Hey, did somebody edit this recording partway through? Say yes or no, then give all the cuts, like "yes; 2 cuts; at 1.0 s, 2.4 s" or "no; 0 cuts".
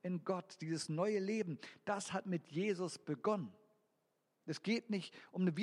yes; 1 cut; at 4.4 s